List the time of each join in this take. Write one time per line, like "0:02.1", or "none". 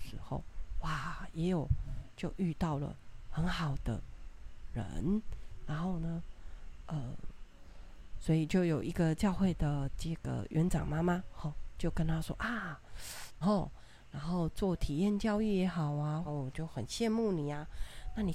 0:13.4
0:16.2